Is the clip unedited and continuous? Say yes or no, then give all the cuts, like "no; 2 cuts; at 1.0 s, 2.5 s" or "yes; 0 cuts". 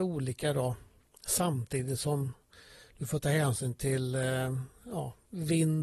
yes; 0 cuts